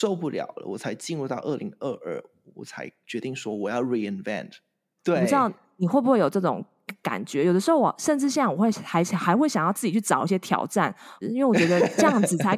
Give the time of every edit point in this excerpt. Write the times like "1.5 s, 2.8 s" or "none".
5.0 s, 11.2 s